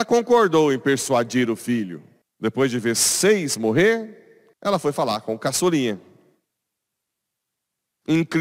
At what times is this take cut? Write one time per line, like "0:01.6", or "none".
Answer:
0:02.2
0:04.5